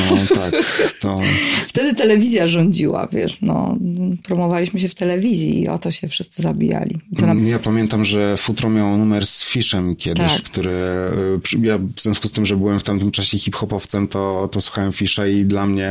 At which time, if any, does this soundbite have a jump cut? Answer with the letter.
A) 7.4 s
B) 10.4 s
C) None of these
A